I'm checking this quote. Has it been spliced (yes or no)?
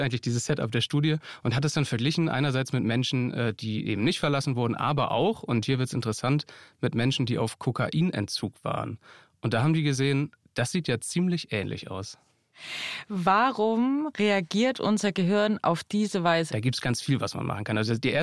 yes